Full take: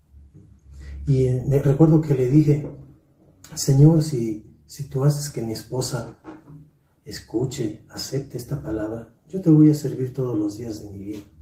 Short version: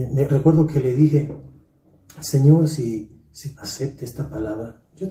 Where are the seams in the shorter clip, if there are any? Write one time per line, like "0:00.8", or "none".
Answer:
0:03.5